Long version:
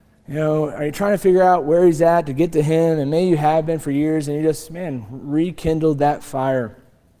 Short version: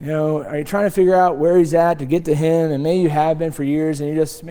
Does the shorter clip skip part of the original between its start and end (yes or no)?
no